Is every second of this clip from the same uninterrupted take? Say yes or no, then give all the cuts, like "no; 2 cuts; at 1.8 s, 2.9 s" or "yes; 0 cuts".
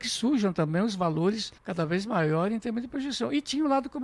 no; 1 cut; at 1.6 s